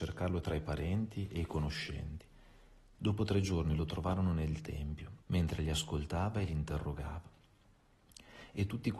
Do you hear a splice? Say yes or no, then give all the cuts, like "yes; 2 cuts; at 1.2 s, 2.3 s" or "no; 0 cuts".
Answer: yes; 2 cuts; at 2.9 s, 5.2 s